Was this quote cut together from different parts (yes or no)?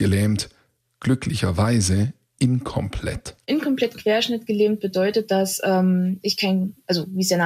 no